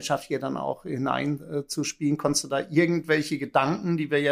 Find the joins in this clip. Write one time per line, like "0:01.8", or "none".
none